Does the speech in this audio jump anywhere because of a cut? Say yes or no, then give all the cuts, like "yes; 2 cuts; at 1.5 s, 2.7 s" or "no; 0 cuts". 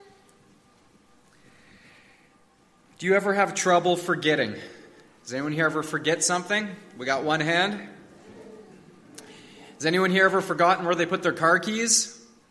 no; 0 cuts